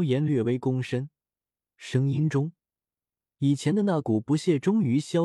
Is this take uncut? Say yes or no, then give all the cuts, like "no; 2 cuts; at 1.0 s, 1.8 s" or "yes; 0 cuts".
yes; 0 cuts